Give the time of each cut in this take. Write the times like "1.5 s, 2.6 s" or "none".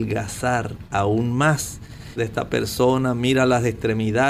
2.2 s